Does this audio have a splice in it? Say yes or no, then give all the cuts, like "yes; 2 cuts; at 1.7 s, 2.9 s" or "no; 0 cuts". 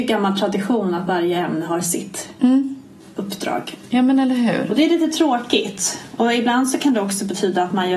no; 0 cuts